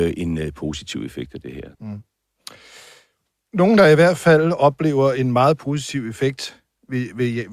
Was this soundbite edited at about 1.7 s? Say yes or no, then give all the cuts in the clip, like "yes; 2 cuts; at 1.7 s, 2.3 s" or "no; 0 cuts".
yes; 1 cut; at 1.7 s